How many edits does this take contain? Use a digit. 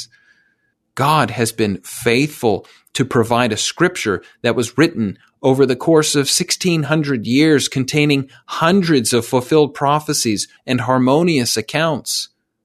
1